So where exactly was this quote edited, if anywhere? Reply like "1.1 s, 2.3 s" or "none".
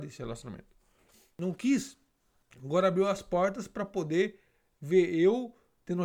none

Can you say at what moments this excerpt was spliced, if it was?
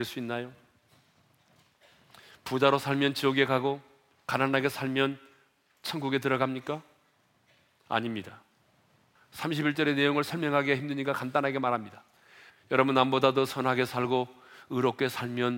9.2 s, 12.5 s

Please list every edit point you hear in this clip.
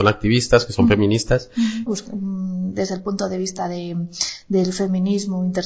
1.9 s

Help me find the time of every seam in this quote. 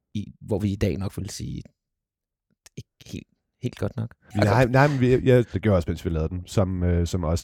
4.3 s, 5.5 s

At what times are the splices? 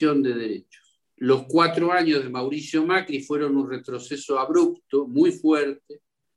1.1 s

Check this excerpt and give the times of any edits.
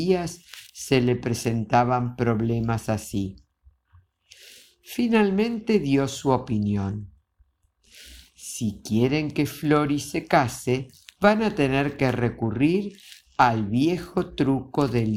11.1 s

